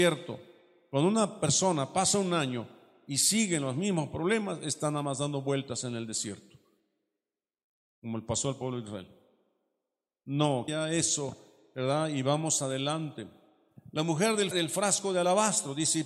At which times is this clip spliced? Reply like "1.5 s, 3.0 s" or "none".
10.7 s, 14.5 s